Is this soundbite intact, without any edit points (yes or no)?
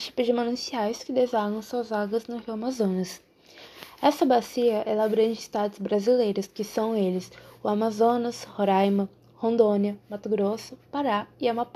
yes